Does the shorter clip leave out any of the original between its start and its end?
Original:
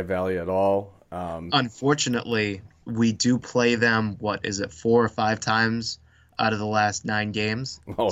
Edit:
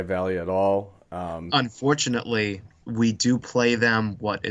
no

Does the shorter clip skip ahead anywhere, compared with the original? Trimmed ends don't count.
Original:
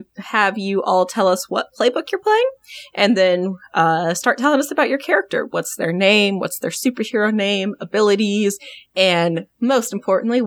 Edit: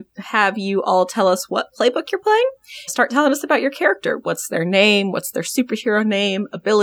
yes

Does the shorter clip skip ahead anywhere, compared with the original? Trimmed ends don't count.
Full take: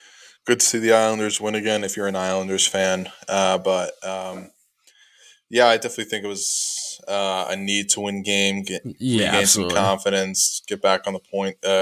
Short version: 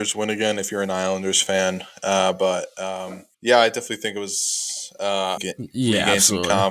yes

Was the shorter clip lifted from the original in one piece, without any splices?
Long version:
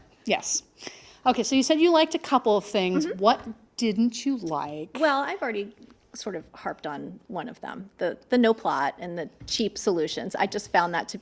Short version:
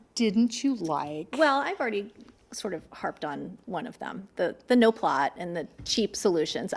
yes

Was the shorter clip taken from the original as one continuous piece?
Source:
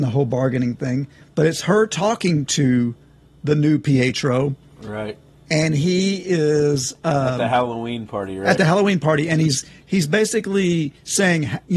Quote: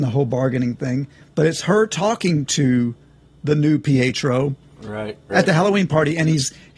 no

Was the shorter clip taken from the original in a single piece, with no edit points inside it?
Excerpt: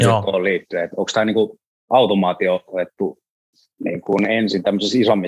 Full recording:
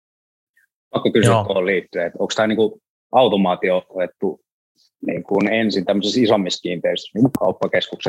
yes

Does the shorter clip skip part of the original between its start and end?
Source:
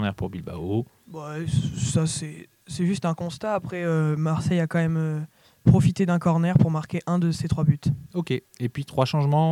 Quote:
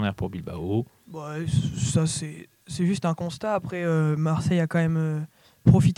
no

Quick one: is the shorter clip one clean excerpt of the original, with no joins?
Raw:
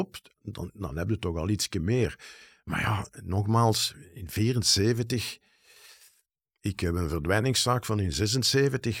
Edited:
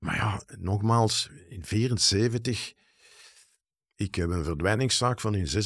yes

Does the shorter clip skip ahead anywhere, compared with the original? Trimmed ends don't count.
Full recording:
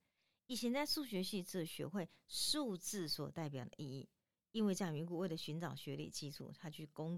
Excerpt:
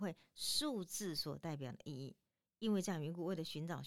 no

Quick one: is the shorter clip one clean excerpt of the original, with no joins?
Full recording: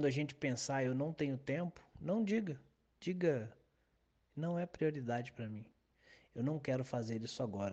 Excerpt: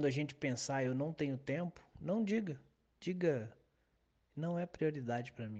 yes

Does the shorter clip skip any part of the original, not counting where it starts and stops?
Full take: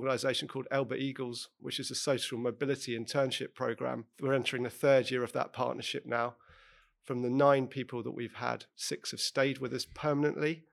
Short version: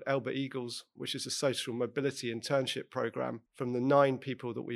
yes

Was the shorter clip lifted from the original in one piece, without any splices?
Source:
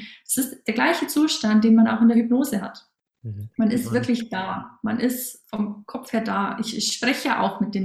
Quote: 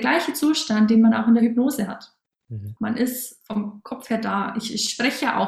no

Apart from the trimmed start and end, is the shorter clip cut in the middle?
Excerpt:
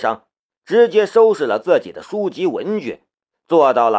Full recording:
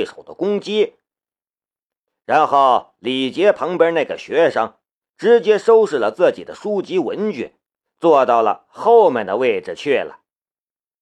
no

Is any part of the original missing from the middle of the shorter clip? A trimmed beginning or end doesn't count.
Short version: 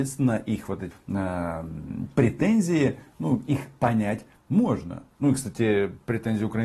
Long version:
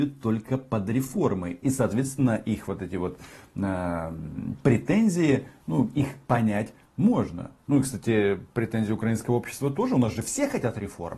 yes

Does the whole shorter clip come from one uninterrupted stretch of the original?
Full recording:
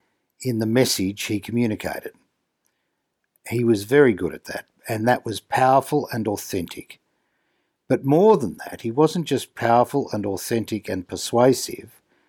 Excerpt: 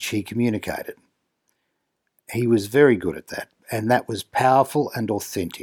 yes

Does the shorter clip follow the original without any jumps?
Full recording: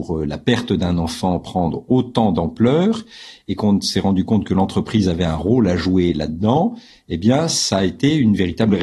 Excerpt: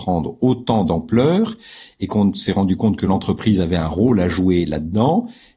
yes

